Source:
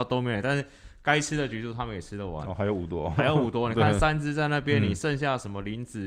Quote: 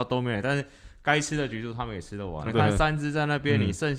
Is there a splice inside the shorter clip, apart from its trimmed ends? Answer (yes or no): yes